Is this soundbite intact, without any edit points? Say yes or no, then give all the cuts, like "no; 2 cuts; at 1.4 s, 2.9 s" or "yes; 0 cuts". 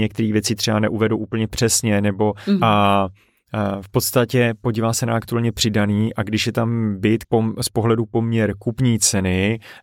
no; 2 cuts; at 2.6 s, 7.2 s